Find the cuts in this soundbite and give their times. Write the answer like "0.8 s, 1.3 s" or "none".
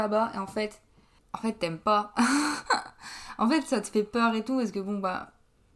none